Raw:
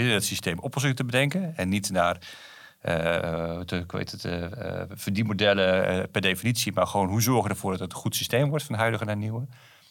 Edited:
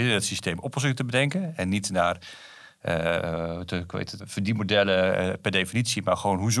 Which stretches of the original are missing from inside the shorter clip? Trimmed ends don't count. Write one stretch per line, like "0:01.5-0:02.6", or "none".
0:04.2-0:04.9